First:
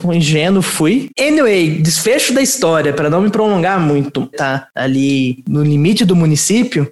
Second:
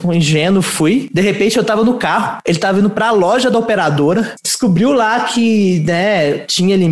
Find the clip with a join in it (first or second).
first